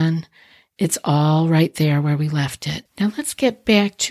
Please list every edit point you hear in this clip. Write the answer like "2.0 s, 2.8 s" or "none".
2.9 s